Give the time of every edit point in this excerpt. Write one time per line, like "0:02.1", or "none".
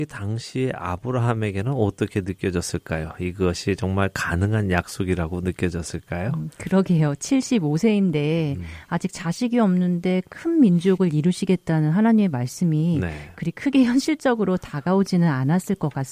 none